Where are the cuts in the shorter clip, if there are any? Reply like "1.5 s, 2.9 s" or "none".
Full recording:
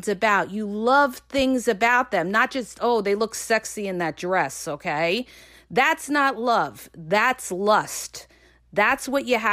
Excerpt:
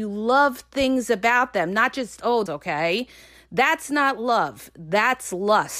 2.5 s